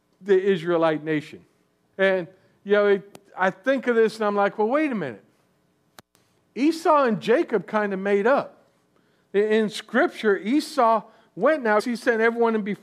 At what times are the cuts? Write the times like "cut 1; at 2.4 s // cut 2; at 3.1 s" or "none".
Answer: cut 1; at 1.9 s // cut 2; at 11.8 s